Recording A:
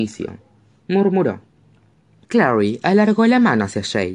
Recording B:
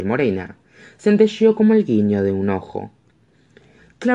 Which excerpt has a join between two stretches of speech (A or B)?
A